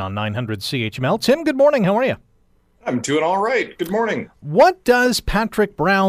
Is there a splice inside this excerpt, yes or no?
no